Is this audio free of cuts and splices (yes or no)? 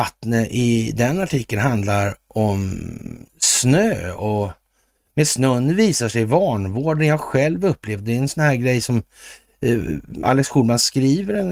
yes